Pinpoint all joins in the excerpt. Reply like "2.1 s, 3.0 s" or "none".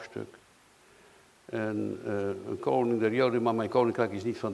none